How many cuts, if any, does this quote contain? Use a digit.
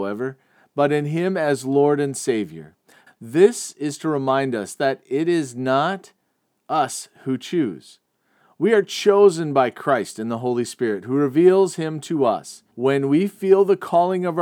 2